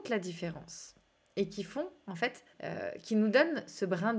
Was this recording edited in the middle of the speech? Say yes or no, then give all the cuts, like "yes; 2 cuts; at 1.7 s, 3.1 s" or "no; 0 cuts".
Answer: yes; 1 cut; at 2.5 s